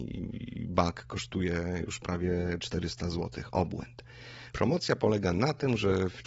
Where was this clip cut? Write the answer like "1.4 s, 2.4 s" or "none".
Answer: 4.5 s